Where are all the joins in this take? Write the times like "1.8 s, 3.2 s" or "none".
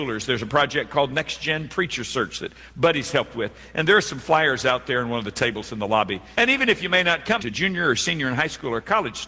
6.3 s, 7.4 s

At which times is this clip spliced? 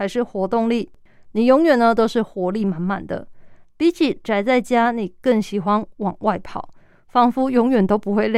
none

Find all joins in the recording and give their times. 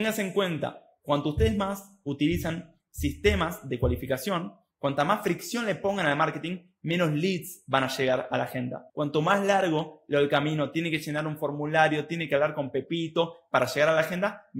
8.9 s

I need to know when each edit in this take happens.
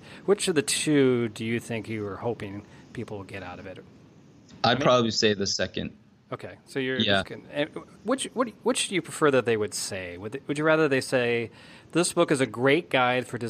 7.2 s

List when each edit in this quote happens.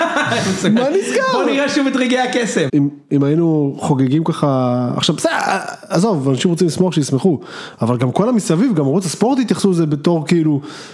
2.7 s

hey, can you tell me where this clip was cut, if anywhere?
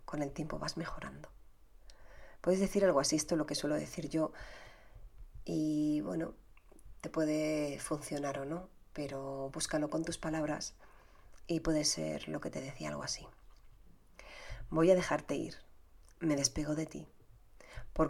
none

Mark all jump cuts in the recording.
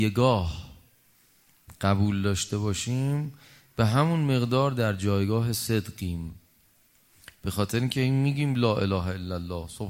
none

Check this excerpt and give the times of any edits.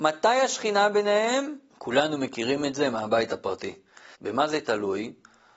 1.7 s, 4.1 s

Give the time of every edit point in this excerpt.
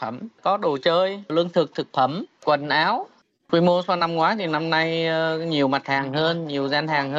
none

